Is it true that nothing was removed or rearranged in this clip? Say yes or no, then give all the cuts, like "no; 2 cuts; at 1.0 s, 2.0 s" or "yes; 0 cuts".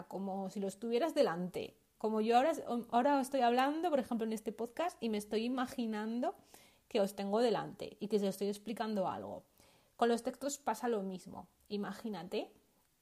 yes; 0 cuts